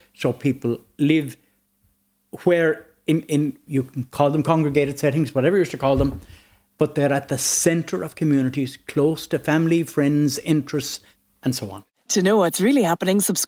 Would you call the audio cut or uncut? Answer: uncut